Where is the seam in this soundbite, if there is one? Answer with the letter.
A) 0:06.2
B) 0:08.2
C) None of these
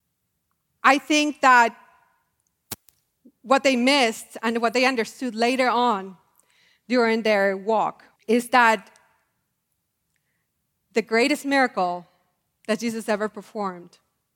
B